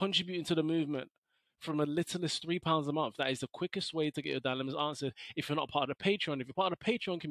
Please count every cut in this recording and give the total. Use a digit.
1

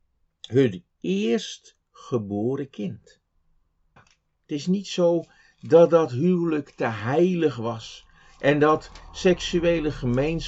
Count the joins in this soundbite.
1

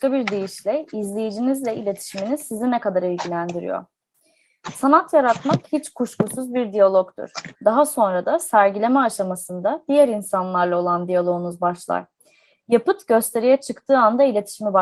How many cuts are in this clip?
1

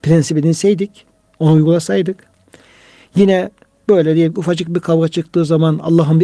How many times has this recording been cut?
0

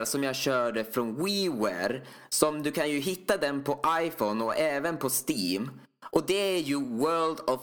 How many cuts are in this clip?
0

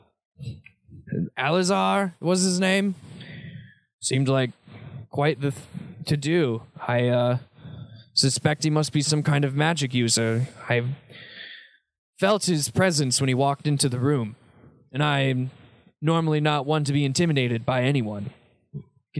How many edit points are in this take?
0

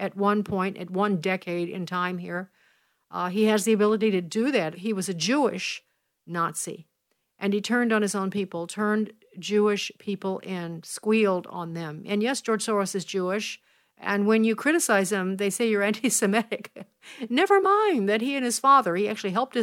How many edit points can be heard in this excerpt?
1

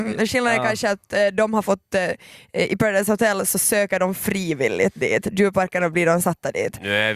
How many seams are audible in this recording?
0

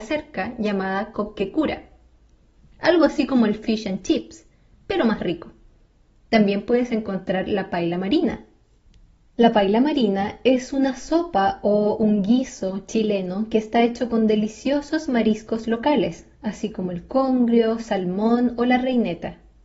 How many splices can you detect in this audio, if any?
1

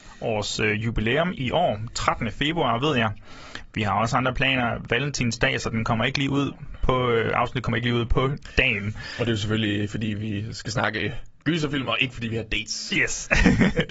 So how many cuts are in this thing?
1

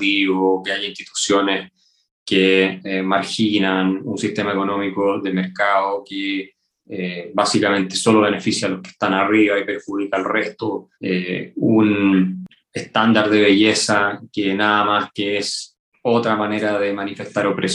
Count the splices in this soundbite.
2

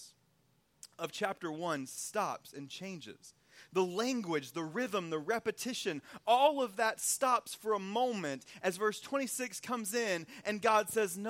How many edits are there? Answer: 0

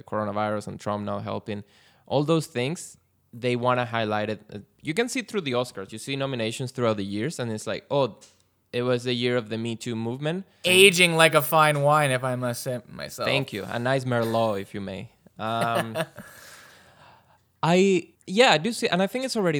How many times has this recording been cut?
2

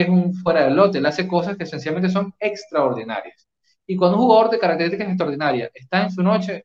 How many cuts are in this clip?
0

